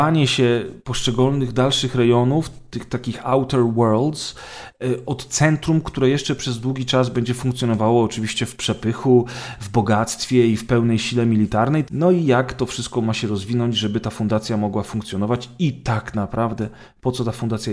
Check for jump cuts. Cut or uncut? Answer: cut